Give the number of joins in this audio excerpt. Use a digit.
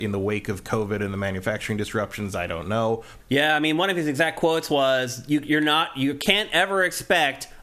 1